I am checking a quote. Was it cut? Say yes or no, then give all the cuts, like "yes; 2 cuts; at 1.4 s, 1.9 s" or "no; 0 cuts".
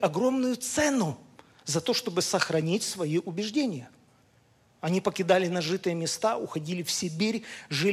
no; 0 cuts